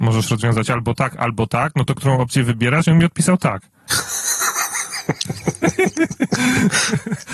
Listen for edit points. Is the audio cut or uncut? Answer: uncut